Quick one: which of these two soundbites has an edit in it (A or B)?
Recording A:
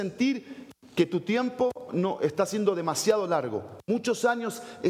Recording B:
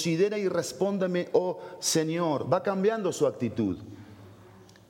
A